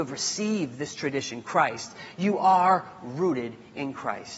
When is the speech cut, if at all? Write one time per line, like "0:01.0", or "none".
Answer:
none